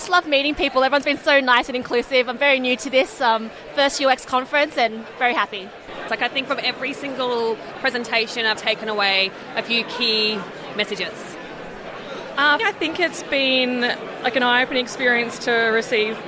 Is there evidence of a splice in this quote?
yes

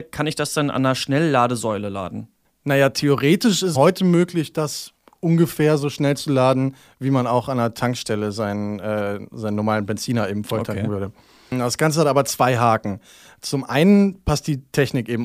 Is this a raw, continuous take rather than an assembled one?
no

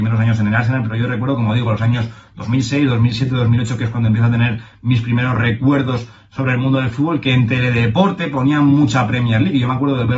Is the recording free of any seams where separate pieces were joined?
yes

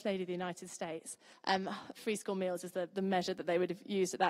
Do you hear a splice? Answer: yes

